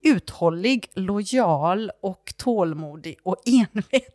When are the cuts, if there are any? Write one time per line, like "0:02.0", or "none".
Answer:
none